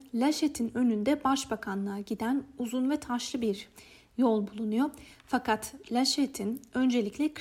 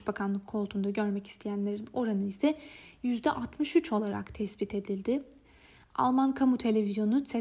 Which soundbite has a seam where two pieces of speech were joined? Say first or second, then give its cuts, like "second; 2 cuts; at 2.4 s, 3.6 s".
second; 1 cut; at 5.8 s